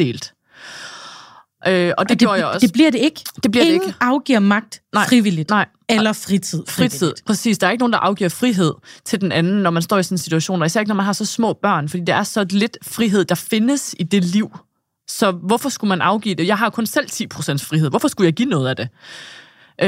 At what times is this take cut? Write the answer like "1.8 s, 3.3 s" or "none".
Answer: none